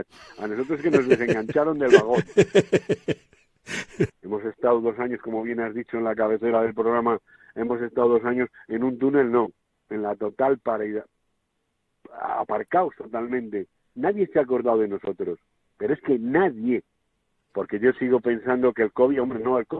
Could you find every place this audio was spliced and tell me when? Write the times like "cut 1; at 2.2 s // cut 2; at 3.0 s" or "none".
cut 1; at 4.1 s // cut 2; at 17.4 s